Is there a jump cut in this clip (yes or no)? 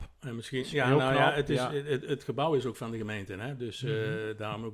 no